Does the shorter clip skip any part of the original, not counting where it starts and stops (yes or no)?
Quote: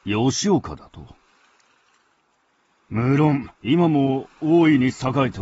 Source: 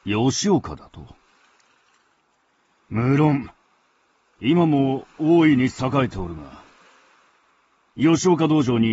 yes